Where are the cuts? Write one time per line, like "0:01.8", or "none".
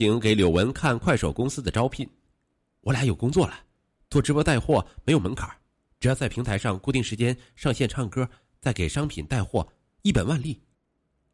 none